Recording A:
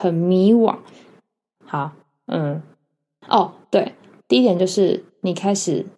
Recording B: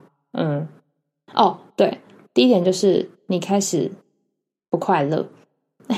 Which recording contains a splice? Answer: A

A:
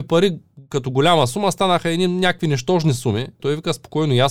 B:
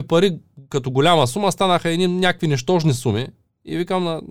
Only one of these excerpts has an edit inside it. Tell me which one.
A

